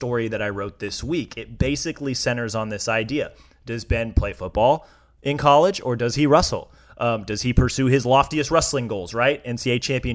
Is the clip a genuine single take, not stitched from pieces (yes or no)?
yes